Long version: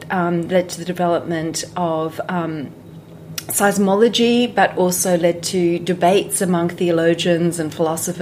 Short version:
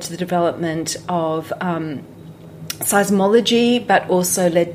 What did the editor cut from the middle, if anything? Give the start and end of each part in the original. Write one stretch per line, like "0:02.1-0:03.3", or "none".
none